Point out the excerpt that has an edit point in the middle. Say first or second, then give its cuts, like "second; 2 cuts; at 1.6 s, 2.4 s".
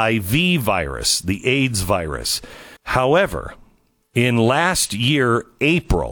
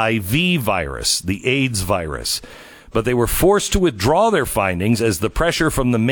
first; 1 cut; at 2.8 s